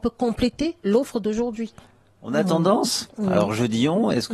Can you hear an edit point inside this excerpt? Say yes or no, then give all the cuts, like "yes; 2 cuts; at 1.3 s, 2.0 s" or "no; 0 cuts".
no; 0 cuts